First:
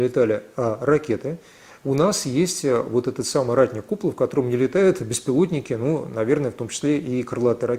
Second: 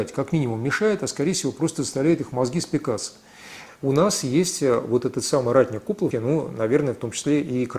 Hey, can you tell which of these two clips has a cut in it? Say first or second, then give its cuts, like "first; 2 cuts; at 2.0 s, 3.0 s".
second; 2 cuts; at 3.7 s, 6.1 s